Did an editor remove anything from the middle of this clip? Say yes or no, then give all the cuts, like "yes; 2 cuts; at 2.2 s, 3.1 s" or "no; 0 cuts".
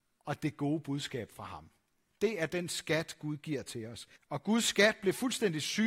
yes; 1 cut; at 4.2 s